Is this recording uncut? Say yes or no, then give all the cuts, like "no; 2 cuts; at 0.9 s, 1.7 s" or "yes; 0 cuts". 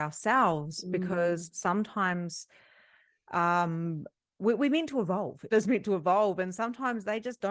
no; 1 cut; at 5.5 s